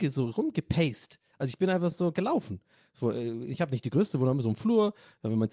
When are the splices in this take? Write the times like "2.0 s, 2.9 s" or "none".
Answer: none